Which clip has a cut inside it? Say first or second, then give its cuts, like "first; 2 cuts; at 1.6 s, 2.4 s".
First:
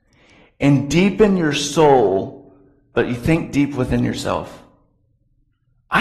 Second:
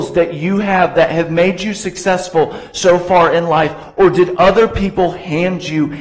first; 1 cut; at 2.9 s